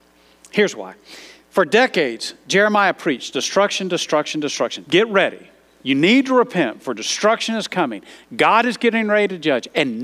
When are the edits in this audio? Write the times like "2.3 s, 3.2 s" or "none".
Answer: 4.9 s